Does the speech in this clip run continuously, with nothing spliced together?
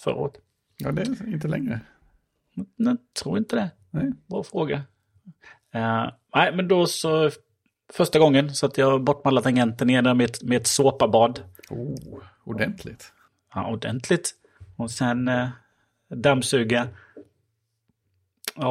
yes; 0 cuts

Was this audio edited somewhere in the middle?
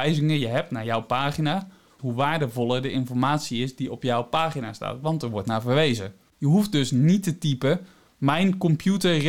yes; 2 cuts; at 2.0 s, 6.3 s

